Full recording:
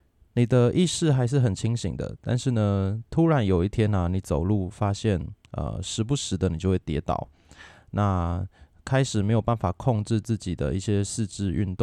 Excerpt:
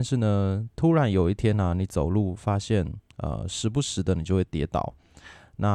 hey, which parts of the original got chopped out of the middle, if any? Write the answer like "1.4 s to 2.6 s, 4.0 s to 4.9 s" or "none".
none